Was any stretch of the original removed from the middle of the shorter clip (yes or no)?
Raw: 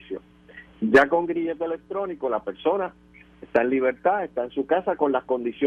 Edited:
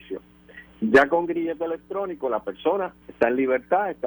yes